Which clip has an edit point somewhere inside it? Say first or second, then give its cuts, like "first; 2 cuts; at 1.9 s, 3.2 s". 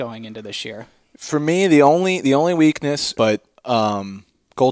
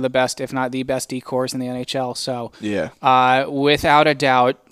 first; 1 cut; at 3.1 s